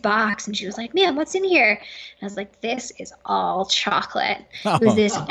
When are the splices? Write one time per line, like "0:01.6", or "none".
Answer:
none